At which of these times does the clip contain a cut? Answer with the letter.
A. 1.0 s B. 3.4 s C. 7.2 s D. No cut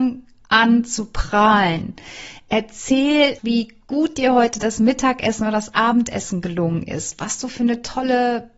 B